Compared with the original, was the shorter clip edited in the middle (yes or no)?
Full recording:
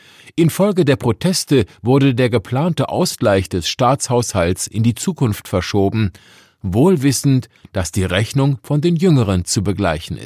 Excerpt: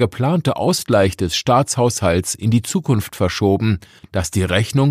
yes